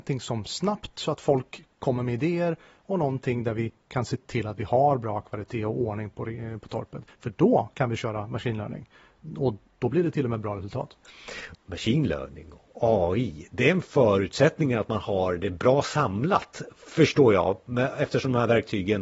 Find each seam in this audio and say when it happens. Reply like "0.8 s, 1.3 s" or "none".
11.5 s